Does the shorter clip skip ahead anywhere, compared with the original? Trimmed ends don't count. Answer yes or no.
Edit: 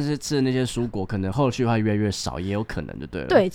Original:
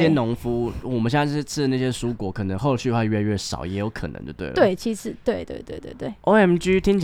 no